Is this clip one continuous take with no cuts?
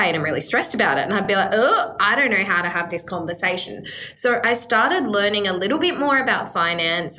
yes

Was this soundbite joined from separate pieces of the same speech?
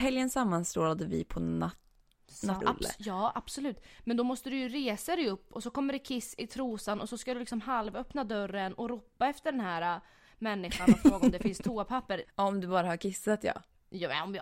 yes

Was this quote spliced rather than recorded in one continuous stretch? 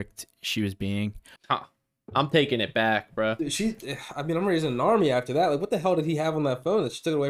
yes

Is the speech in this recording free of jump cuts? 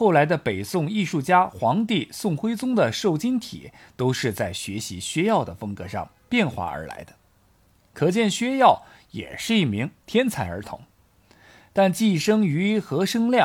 yes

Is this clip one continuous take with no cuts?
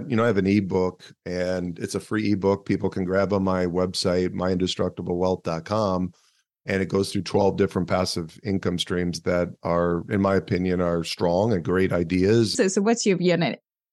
no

